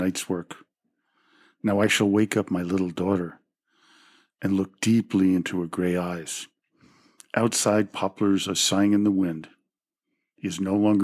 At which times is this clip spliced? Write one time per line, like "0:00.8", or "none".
none